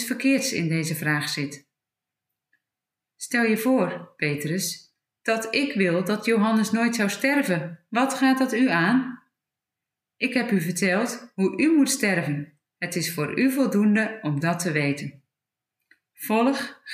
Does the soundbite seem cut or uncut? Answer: cut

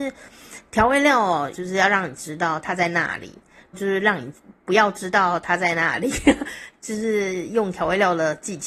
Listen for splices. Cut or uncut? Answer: cut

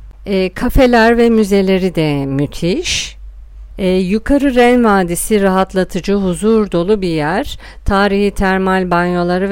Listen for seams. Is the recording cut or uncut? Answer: uncut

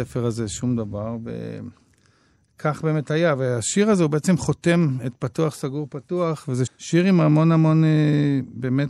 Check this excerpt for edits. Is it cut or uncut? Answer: cut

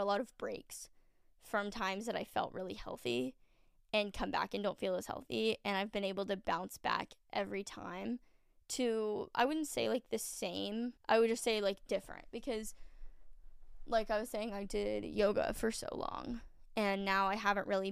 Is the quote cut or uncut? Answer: cut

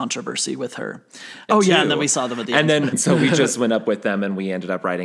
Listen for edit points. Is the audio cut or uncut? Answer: cut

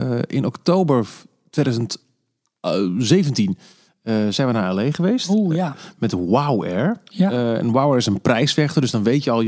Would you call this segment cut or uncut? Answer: uncut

